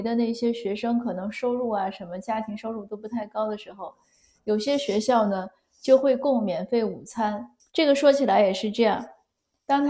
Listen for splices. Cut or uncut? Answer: cut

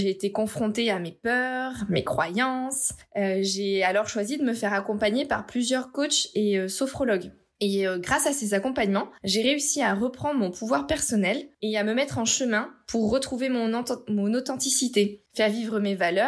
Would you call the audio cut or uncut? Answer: uncut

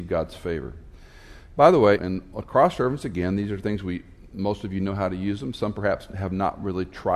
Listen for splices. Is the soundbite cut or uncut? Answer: cut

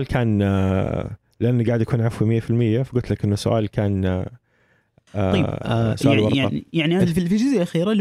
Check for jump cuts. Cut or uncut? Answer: cut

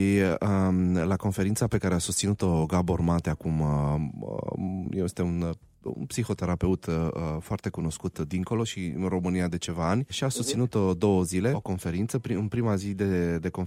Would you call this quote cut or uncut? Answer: uncut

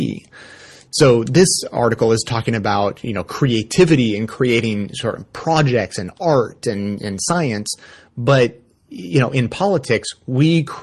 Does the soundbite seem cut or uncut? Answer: uncut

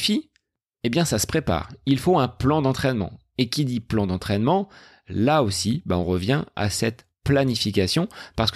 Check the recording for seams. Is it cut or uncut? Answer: uncut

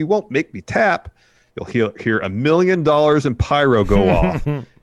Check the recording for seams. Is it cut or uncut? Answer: cut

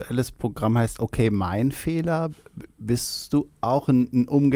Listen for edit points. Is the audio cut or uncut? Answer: uncut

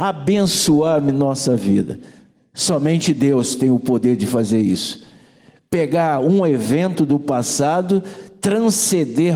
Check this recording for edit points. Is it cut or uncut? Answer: uncut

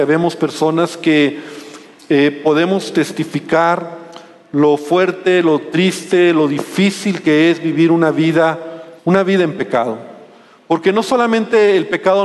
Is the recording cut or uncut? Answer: cut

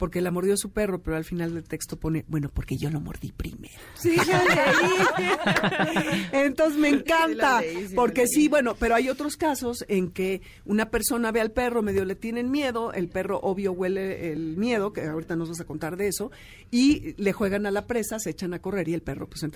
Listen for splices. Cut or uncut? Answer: uncut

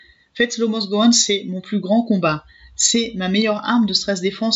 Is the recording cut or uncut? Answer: uncut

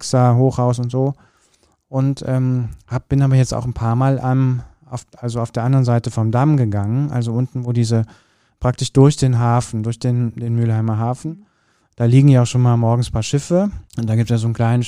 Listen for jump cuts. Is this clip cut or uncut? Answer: cut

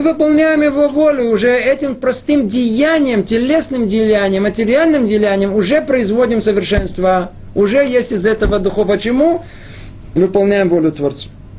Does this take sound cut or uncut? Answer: uncut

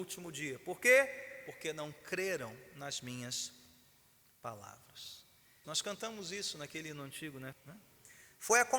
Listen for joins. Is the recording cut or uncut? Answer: cut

